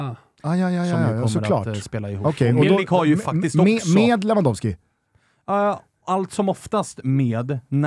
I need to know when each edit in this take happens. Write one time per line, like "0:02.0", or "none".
none